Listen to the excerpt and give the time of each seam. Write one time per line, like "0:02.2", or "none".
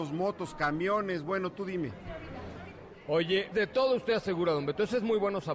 0:03.5